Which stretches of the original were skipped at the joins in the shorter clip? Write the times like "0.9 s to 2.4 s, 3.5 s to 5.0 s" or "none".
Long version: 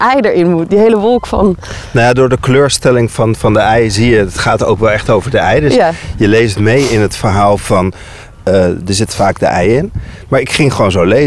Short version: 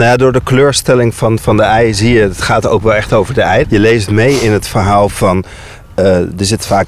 5.6 s to 6.1 s